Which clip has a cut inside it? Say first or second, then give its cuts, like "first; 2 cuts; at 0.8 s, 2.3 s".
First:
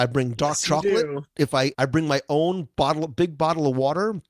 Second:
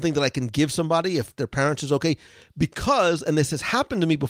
first; 1 cut; at 1.7 s